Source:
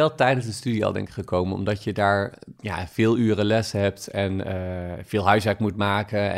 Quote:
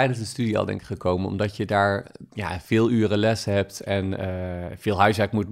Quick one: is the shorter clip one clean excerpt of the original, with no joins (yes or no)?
yes